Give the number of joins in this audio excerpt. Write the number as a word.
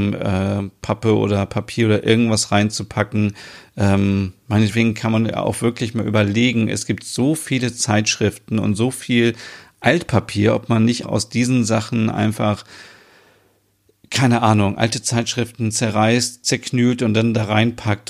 one